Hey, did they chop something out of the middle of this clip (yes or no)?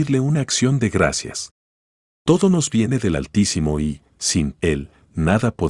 no